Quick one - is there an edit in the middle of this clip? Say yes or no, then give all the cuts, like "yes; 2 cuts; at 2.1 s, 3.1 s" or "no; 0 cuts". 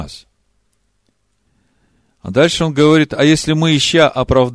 no; 0 cuts